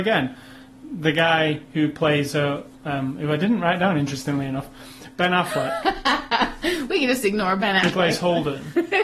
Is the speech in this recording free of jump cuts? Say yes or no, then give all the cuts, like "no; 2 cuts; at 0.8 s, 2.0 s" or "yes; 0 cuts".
no; 1 cut; at 2.7 s